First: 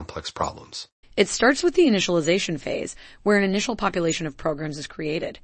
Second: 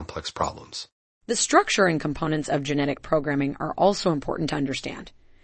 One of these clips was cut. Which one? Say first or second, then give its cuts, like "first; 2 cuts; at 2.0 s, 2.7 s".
first; 1 cut; at 1.0 s